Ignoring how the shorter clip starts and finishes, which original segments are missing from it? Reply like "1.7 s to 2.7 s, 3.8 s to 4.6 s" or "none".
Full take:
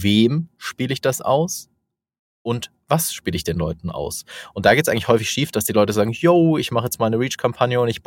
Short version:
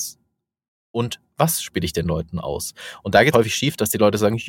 4.8 s to 5.1 s